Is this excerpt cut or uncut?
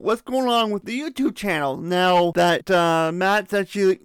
uncut